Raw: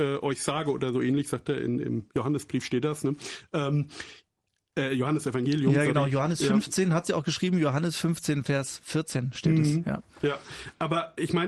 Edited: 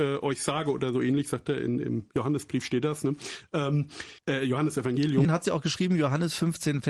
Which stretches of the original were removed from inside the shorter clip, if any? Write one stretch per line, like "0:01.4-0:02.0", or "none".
0:04.2-0:04.7
0:05.7-0:06.9